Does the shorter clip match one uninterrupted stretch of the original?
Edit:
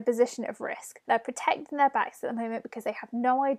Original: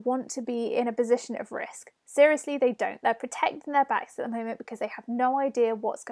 no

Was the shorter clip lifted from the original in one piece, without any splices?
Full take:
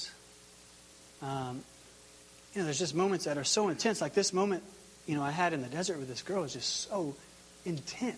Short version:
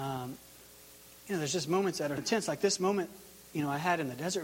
no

